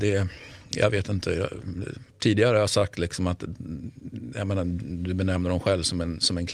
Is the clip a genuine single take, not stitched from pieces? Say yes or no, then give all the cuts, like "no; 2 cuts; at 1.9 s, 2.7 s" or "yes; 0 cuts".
no; 1 cut; at 2.1 s